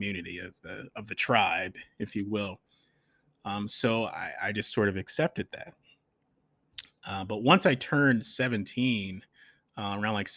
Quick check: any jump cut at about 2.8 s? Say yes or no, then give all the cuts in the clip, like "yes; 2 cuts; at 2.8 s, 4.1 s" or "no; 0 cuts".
no; 0 cuts